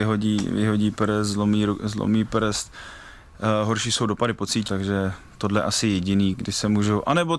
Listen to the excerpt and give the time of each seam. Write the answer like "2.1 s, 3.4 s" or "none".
4.7 s, 6.3 s